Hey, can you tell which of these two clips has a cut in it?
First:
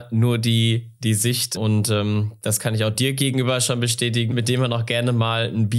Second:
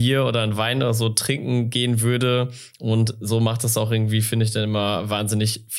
first; 2 cuts; at 1.6 s, 4.3 s

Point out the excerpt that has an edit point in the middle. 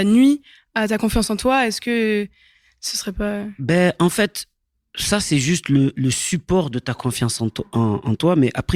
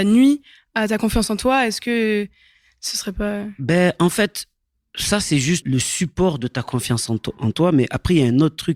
second; 2 cuts; at 5.6 s, 7.4 s

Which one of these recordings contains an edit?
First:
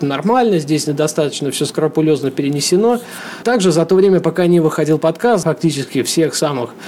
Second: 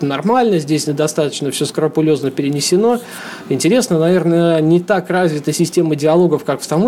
first; 2 cuts; at 3.4 s, 5.4 s

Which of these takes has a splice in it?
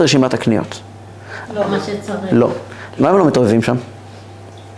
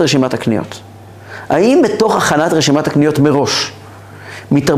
first; 2 cuts; at 1.5 s, 3.0 s

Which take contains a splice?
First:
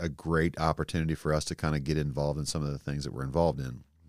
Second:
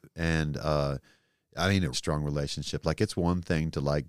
second; 1 cut; at 1.9 s

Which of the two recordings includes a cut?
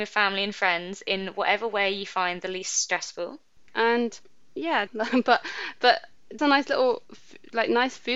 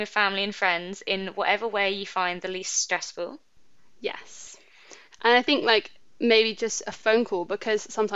first; 3 cuts; at 3.7 s, 4.9 s, 6.4 s

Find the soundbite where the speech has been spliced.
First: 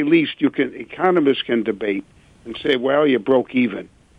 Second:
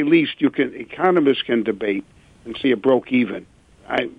second; 1 cut; at 2.6 s

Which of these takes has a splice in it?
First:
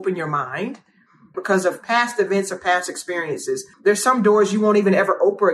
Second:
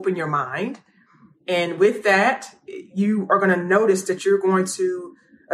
first; 2 cuts; at 1.3 s, 3.7 s

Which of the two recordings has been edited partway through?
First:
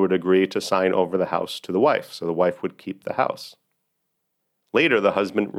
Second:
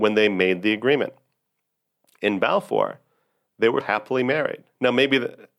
second; 1 cut; at 3.8 s

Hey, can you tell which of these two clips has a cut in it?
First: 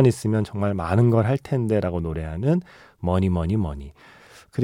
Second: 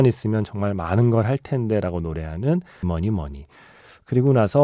second; 1 cut; at 2.8 s

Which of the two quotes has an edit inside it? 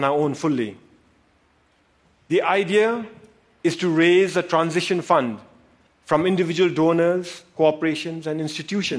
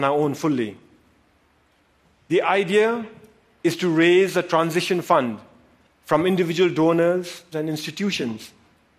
second; 1 cut; at 7.5 s

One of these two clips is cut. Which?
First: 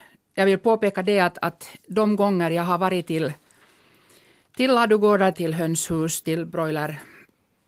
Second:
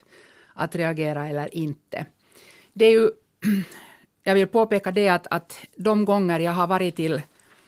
first; 1 cut; at 5.3 s

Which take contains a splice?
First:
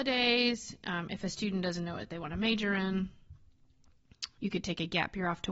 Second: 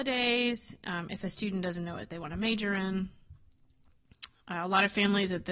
first; 1 cut; at 4.4 s

